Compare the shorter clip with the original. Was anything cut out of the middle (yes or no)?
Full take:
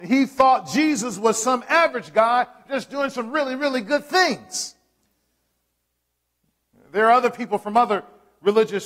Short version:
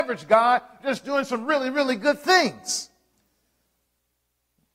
no